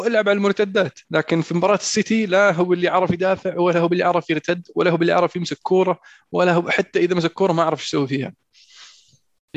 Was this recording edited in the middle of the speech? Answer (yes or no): yes